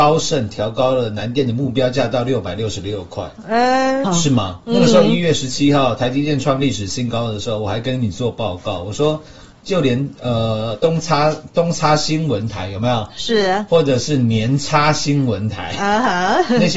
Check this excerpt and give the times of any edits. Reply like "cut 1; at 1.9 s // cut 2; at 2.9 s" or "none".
cut 1; at 4.0 s